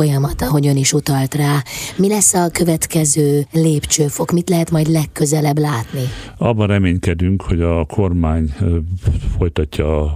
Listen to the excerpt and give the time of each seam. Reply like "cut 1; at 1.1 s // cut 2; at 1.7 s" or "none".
none